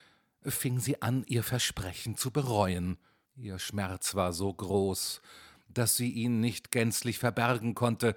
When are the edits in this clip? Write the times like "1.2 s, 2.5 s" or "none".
3.2 s